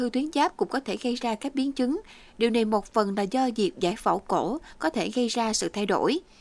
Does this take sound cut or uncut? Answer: uncut